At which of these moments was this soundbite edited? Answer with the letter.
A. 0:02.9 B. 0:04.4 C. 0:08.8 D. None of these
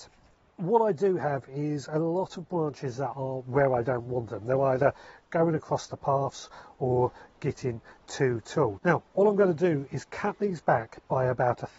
C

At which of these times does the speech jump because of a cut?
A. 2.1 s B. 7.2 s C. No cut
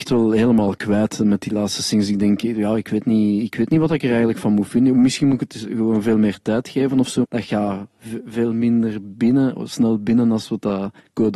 B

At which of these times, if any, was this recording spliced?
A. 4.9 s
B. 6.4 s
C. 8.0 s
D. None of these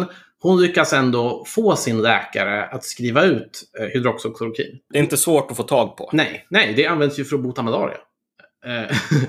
A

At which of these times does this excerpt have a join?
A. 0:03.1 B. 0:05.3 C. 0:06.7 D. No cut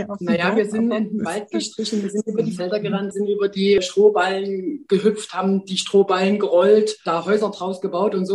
A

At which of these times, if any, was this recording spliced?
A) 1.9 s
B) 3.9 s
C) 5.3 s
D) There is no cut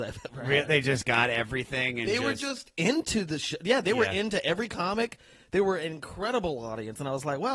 D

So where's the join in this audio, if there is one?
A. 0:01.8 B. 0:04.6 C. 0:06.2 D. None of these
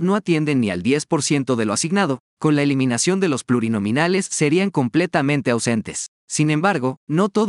C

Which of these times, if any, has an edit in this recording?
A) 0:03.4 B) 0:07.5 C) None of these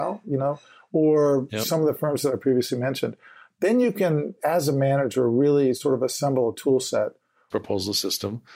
B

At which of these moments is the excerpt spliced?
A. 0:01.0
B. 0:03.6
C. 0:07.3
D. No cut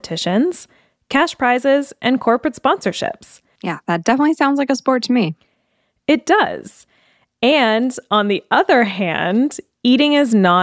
B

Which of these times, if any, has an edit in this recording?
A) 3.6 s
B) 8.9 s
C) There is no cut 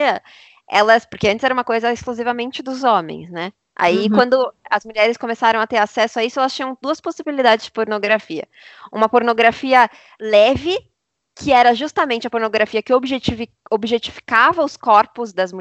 C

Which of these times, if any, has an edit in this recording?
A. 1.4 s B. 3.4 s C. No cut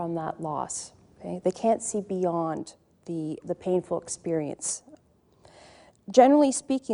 B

